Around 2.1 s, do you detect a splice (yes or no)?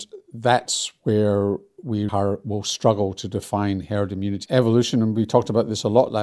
yes